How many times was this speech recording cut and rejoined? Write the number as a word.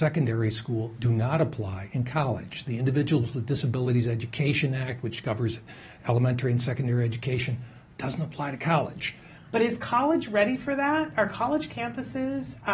one